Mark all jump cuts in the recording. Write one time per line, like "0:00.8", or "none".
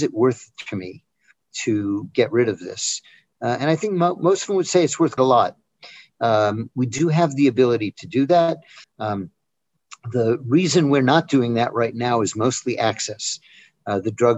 0:05.2
0:08.8